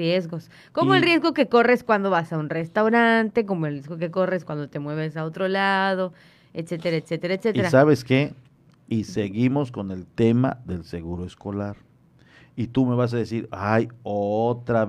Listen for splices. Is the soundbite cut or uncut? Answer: uncut